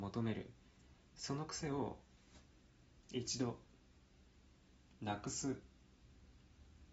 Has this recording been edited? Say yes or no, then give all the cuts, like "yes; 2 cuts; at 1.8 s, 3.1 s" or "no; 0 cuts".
no; 0 cuts